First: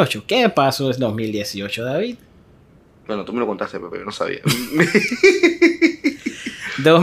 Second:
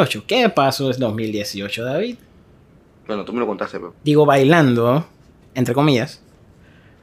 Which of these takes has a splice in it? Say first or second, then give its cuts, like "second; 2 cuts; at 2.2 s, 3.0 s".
second; 1 cut; at 3.9 s